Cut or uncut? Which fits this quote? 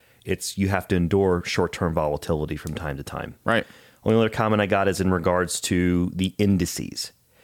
uncut